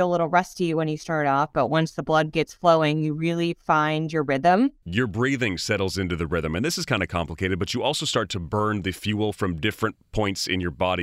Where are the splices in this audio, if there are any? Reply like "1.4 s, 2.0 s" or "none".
none